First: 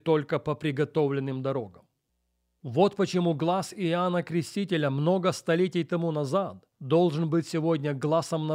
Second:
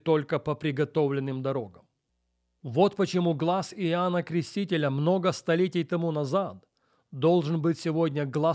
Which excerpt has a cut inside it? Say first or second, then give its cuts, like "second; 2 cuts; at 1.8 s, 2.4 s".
first; 1 cut; at 6.7 s